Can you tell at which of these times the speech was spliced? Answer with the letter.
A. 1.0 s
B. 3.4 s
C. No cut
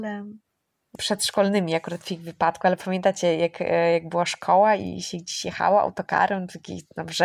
A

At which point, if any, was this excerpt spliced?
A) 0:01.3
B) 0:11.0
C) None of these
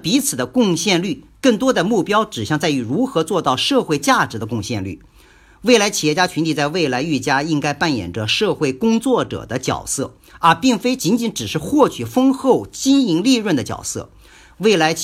C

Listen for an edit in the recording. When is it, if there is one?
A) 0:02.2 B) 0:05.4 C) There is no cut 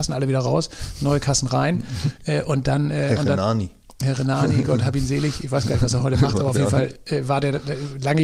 C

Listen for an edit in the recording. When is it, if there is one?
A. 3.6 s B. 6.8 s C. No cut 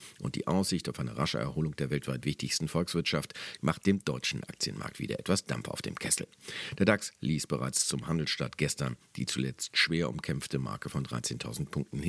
A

